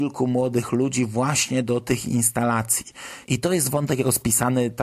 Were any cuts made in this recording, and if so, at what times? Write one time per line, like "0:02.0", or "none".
0:03.2